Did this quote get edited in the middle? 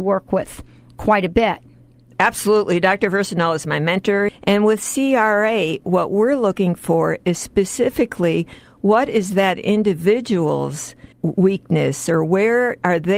yes; 2 cuts; at 4.3 s, 11.1 s

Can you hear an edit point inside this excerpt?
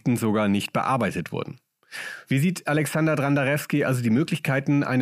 yes; 1 cut; at 2.2 s

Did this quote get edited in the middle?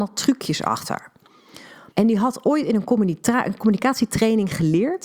yes; 1 cut; at 1.9 s

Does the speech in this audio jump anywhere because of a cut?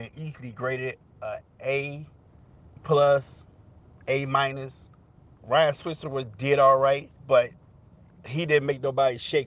yes; 3 cuts; at 2.8 s, 5.4 s, 7.2 s

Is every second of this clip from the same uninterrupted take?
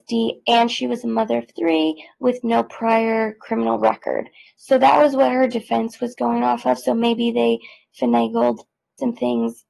yes; 0 cuts

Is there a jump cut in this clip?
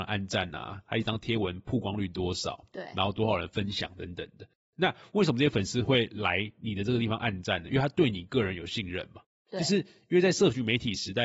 no; 0 cuts

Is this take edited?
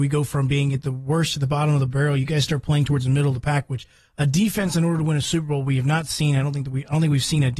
no; 0 cuts

